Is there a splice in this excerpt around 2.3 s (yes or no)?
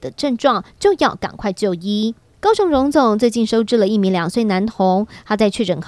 yes